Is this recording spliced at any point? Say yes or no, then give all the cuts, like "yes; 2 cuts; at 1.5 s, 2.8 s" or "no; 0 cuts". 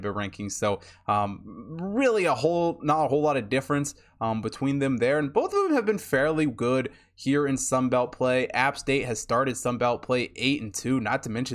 no; 0 cuts